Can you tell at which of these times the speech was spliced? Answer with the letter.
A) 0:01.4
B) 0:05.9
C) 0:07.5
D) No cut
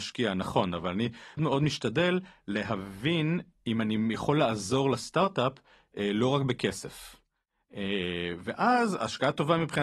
A